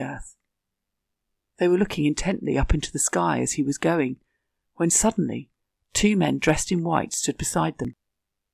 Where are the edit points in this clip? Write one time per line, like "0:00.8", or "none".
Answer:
0:01.5